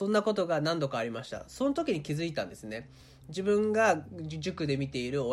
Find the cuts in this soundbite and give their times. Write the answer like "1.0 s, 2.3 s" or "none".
none